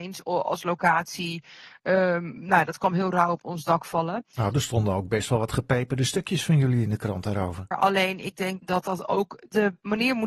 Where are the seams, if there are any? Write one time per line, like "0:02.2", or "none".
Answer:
0:07.7